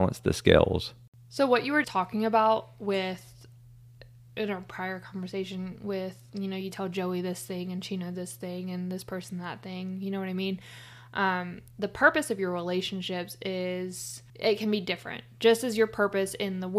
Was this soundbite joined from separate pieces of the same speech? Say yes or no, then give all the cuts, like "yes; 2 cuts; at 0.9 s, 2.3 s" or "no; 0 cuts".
yes; 2 cuts; at 1.8 s, 14.3 s